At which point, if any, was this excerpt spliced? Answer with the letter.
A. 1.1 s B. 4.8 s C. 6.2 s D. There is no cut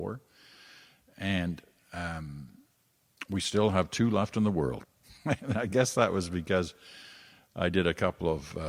B